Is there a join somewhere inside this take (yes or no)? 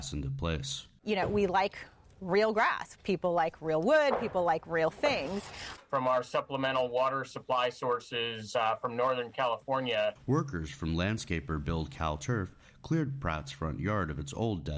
yes